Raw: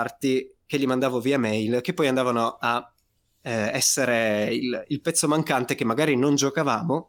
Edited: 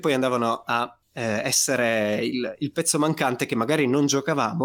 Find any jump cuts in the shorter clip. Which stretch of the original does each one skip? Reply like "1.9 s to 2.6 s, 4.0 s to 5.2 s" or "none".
3.0 s to 3.3 s